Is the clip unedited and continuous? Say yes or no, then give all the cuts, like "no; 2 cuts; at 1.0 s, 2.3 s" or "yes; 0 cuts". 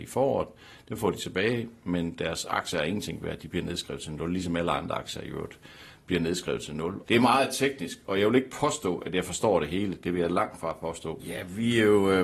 no; 2 cuts; at 7.0 s, 11.2 s